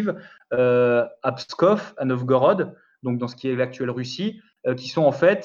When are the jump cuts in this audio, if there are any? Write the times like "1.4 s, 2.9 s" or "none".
none